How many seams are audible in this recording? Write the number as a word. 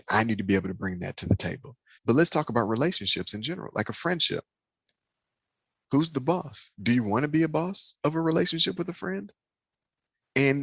one